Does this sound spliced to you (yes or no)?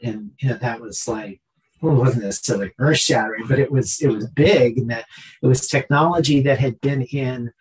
no